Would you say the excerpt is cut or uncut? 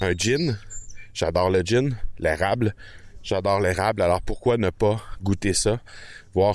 uncut